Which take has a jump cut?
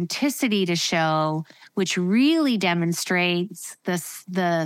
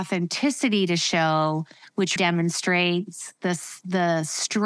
second; 1 cut; at 2.2 s

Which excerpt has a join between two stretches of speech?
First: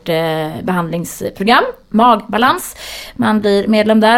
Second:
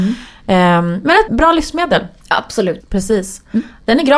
second; 2 cuts; at 1.3 s, 2.8 s

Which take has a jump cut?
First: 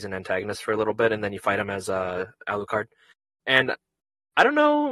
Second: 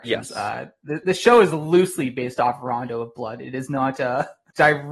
second; 1 cut; at 1.0 s

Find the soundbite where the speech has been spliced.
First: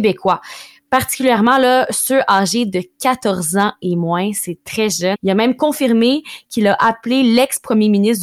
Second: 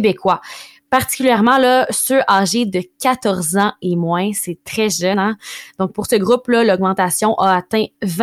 first; 1 cut; at 5.1 s

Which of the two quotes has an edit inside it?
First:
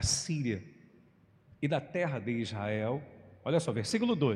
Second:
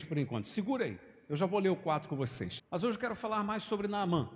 second; 1 cut; at 2.6 s

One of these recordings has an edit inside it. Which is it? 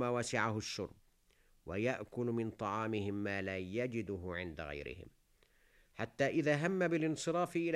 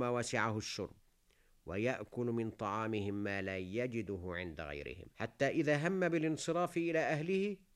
second; 1 cut; at 5.1 s

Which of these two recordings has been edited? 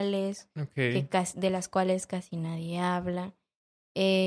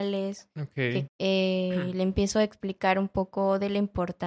second; 1 cut; at 1.1 s

